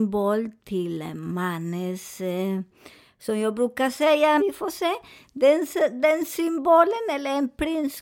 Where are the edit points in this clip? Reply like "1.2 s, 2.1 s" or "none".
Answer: 4.4 s